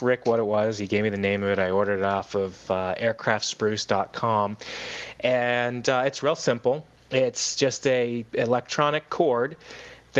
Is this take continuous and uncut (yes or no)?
yes